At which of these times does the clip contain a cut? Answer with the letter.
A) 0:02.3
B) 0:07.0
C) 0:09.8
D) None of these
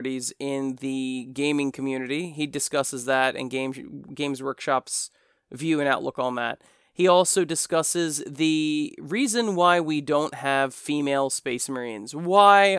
D